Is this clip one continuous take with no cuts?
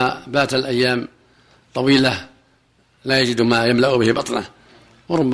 yes; 0 cuts

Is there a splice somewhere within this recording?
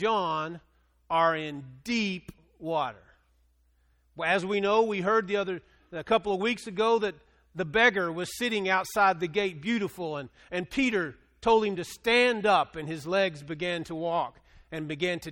no; 0 cuts

